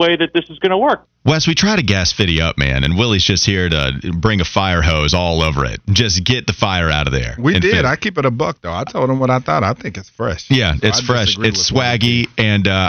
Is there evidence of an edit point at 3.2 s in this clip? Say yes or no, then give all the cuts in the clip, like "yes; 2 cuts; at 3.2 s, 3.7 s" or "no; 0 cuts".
no; 1 cut; at 1.0 s